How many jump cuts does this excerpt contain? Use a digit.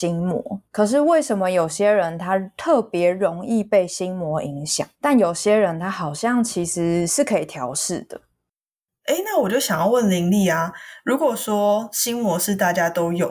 0